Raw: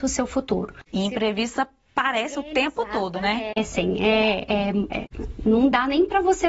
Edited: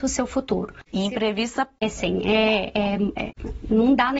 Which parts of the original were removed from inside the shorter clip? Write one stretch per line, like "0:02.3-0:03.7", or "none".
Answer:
0:01.8-0:03.5